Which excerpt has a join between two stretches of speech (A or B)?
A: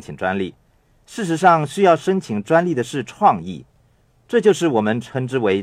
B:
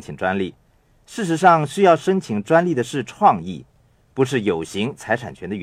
B